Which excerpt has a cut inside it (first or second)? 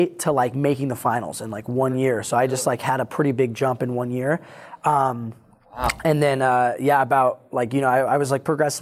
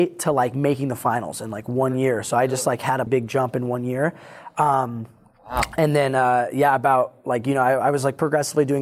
second